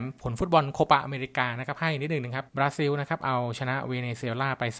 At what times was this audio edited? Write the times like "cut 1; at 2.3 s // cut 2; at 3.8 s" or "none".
cut 1; at 2.5 s